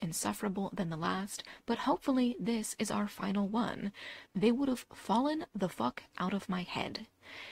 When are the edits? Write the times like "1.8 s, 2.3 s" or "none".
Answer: 4.3 s